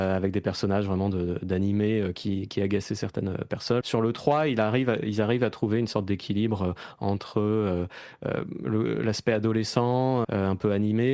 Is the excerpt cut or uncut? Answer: cut